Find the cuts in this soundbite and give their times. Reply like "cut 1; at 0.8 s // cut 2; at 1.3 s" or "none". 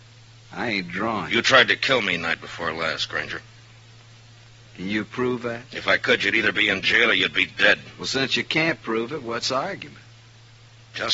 none